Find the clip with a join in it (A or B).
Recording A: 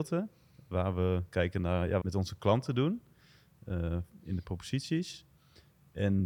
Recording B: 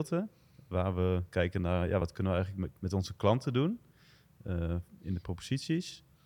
A